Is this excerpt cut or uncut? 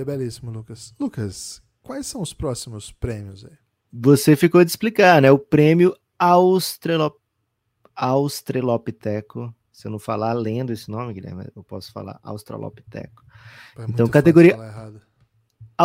uncut